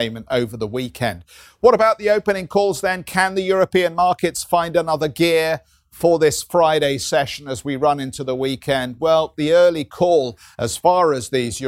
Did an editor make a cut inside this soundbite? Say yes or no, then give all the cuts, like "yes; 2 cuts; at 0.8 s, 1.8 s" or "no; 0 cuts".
no; 0 cuts